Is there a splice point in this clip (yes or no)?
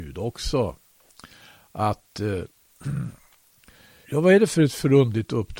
yes